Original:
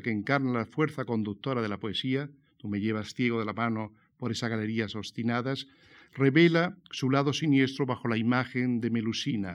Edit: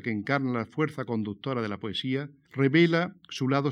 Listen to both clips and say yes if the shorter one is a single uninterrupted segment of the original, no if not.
no